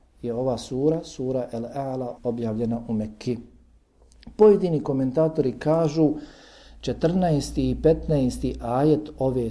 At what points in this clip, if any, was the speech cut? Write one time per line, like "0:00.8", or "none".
0:02.2

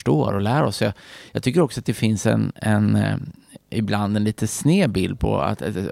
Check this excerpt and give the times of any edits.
none

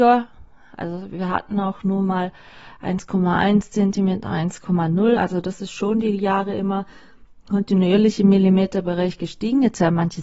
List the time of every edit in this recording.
none

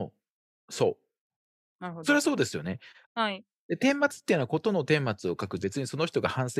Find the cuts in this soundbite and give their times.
0:01.7
0:03.0
0:05.6

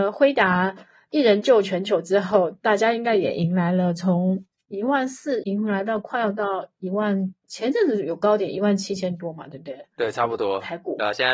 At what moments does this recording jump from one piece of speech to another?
0:05.4

